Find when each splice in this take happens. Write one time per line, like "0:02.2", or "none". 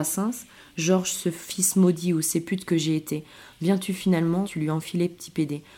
0:04.4